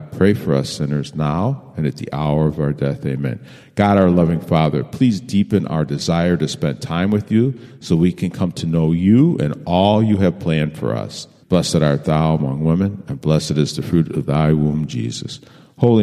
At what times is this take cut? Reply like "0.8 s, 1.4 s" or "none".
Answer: 11.4 s